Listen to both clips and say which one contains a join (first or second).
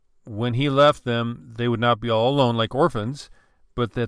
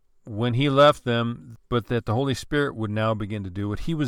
second